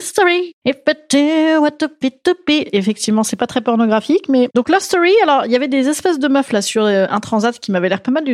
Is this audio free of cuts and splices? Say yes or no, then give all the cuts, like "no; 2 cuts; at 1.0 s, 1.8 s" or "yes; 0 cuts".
yes; 0 cuts